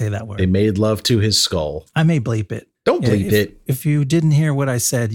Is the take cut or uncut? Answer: uncut